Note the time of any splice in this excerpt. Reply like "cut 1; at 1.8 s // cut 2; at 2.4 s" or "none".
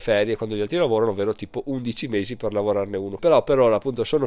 cut 1; at 3.2 s